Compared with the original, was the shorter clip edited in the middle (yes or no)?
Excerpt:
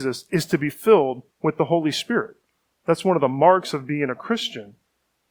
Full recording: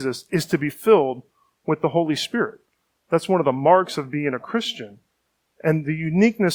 yes